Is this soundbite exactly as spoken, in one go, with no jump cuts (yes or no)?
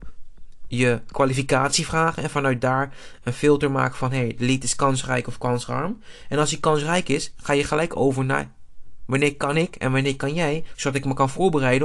yes